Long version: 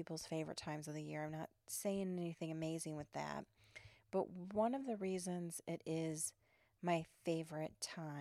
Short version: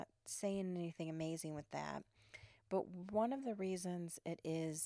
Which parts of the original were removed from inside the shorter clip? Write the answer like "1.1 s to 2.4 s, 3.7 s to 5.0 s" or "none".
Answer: none

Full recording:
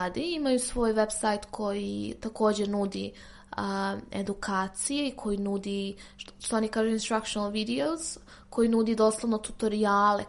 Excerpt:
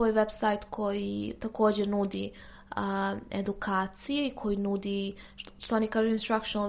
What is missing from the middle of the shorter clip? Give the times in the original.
none

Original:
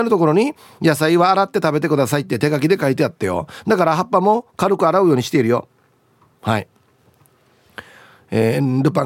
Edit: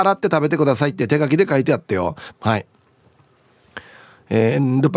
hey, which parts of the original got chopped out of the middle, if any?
3.6 s to 6.3 s

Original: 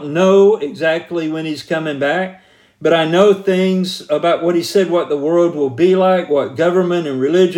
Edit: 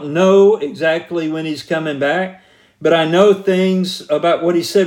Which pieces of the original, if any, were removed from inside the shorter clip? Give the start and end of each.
none

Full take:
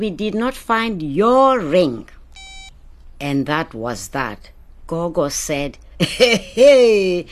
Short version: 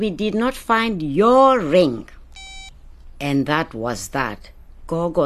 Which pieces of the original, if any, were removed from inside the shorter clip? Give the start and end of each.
none

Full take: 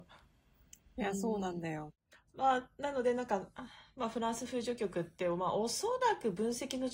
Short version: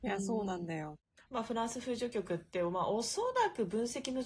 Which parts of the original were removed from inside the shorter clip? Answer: 2.2 s to 3.9 s

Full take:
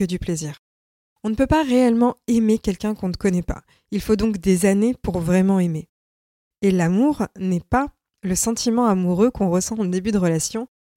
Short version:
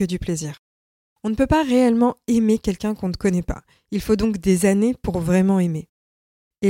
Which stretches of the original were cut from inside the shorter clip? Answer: none

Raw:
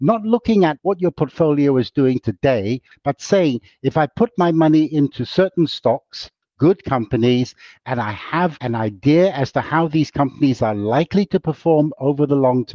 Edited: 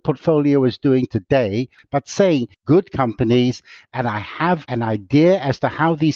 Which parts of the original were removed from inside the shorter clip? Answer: 3.7 s to 6.5 s

